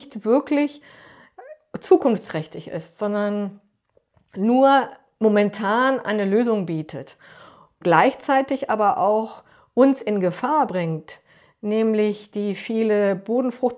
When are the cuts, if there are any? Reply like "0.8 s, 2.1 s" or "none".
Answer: none